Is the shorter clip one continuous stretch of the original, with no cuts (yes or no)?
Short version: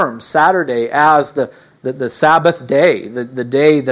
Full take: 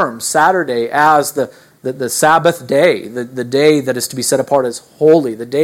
yes